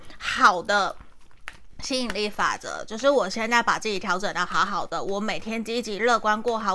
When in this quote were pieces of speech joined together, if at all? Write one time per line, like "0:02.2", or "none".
none